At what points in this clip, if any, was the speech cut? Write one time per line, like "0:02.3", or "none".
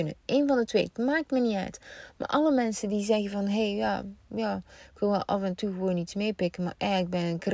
none